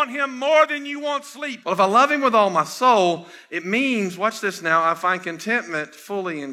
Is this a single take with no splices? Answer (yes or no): no